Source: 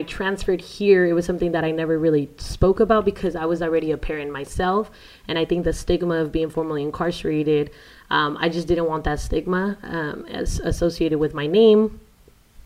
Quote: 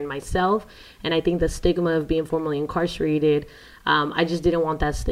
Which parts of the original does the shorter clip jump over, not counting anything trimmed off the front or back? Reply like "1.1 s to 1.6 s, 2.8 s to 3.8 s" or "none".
none